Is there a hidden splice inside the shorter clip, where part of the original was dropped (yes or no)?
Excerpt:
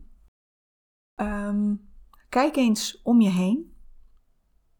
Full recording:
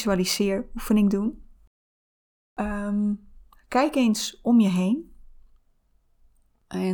no